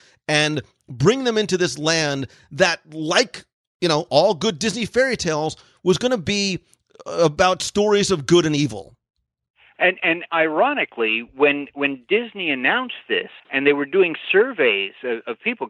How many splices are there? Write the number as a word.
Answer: one